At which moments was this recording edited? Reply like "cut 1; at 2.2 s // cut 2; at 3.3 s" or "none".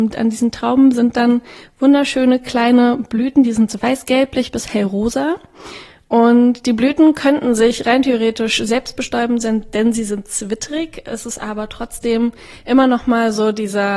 none